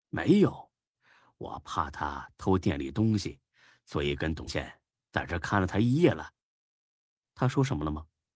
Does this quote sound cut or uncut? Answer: cut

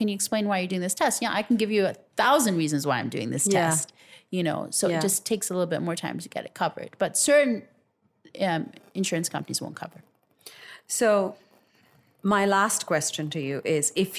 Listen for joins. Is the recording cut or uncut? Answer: uncut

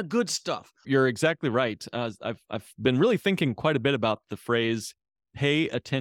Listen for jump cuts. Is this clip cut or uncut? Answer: uncut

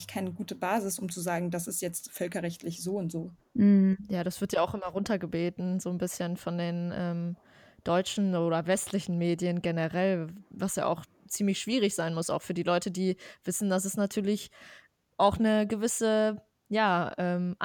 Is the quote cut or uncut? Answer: uncut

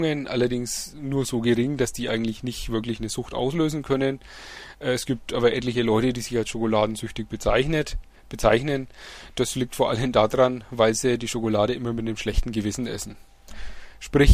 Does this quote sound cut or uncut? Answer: uncut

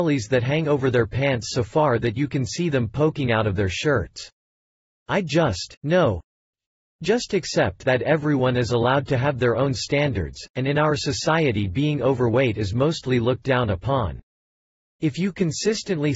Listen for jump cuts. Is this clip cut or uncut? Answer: uncut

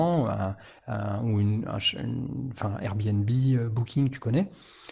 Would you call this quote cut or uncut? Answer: uncut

